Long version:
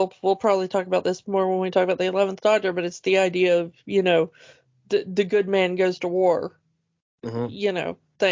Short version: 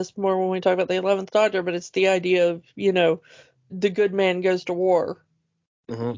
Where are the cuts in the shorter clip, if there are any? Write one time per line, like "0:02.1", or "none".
0:03.7